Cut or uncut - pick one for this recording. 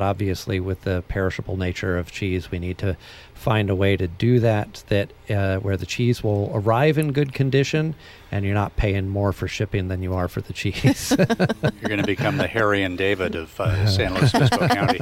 uncut